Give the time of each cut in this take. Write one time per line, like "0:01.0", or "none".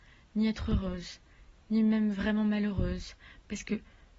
none